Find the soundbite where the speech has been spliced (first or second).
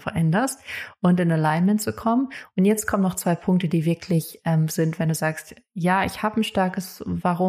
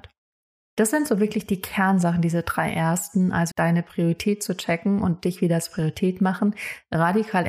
second